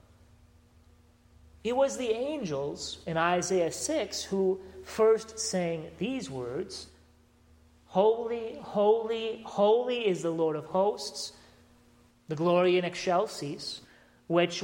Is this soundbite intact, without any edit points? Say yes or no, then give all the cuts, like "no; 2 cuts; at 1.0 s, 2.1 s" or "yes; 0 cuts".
no; 1 cut; at 12.1 s